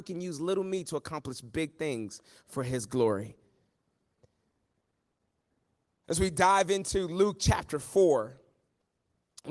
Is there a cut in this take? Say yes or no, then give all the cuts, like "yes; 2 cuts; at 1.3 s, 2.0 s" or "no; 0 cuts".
no; 0 cuts